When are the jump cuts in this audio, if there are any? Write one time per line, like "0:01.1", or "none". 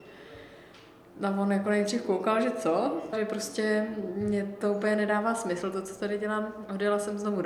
0:03.1